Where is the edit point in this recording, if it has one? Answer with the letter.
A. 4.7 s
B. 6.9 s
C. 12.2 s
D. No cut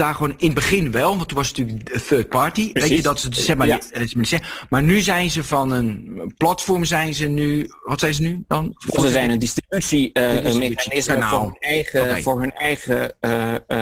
D